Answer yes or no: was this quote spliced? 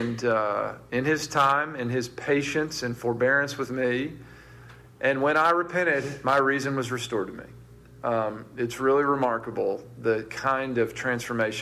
no